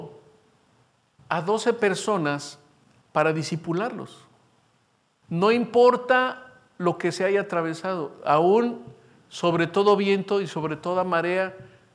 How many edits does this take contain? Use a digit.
1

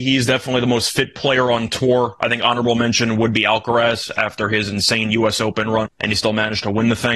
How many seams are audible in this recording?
1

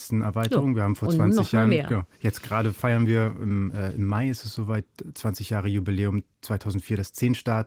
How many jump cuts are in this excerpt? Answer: 0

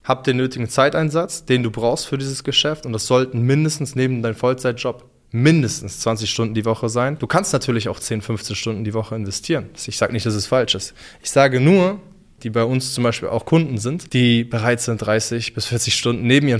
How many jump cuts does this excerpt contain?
1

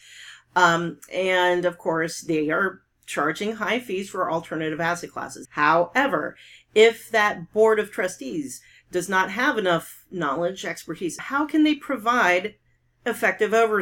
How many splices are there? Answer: 2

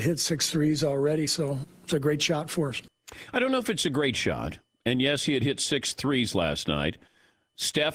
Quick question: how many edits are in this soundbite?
0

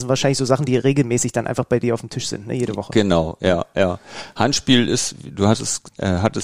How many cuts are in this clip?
0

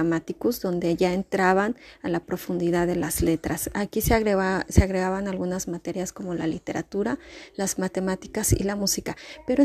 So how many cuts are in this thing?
0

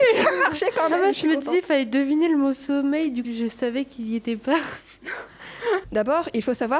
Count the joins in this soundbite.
2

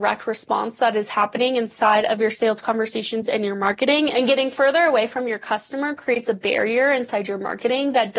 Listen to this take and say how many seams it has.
1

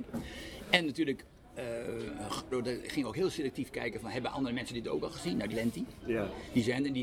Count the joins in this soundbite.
2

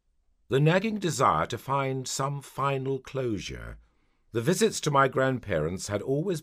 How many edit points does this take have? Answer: 1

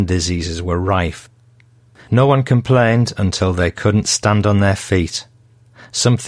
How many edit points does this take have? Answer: 0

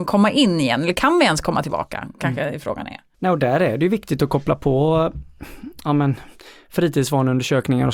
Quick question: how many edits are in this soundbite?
1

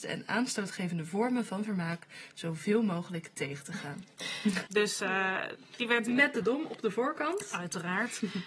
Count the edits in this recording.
1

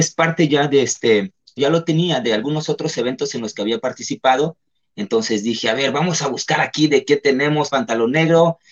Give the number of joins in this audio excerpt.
2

